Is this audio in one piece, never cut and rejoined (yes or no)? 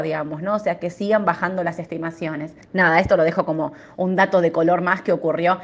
no